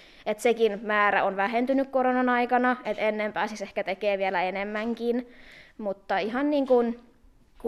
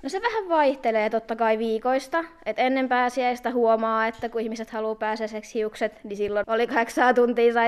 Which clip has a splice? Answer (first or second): second